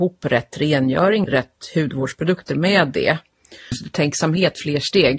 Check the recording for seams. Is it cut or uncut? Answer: cut